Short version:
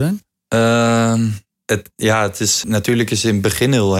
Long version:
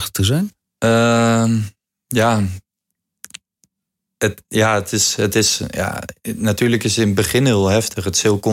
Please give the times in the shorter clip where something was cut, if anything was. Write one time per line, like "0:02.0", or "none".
0:01.5
0:02.6